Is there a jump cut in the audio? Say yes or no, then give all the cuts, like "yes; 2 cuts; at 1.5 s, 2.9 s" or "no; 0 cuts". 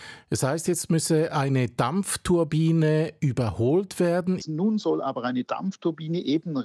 yes; 1 cut; at 4.4 s